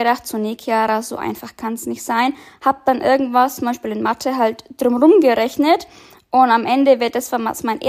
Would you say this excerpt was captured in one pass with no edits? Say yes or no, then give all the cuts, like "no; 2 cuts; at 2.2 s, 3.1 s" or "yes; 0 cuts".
yes; 0 cuts